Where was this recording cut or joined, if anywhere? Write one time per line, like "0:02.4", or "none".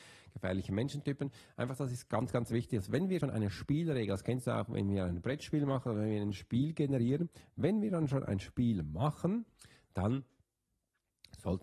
0:03.2